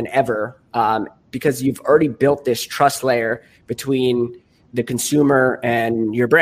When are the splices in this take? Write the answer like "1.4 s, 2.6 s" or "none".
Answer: 4.7 s